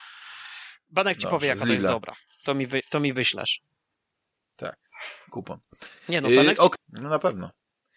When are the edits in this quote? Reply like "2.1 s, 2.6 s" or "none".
6.7 s